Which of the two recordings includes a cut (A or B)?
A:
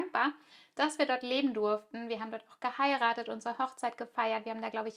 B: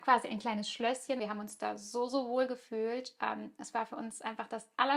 B